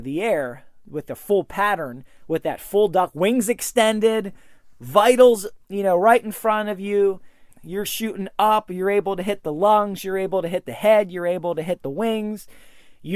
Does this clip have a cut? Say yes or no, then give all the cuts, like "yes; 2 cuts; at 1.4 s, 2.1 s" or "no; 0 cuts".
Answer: yes; 1 cut; at 7.5 s